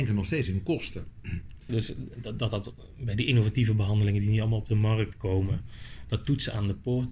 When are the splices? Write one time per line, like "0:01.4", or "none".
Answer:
0:01.7